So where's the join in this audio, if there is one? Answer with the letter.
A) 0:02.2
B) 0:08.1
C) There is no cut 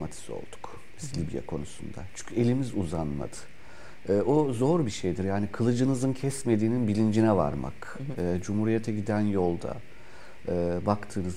B